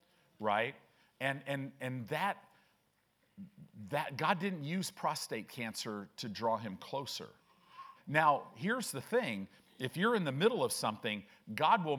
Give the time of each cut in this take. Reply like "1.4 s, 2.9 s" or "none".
8.0 s